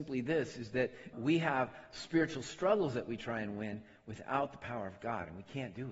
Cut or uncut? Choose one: cut